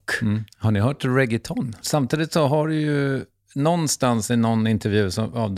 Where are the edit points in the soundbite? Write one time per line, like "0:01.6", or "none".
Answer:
0:01.8